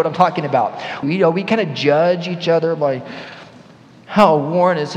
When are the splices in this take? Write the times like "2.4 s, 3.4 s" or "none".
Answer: 1.0 s